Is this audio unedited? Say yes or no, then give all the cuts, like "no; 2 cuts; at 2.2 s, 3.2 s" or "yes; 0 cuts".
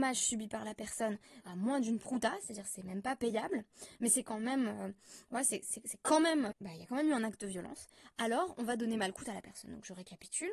no; 2 cuts; at 1.4 s, 6.5 s